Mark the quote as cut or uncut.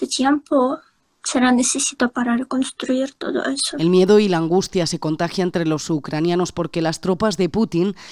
uncut